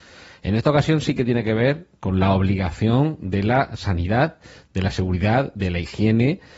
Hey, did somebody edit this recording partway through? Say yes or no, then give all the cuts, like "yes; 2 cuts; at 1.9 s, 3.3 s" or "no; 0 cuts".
no; 0 cuts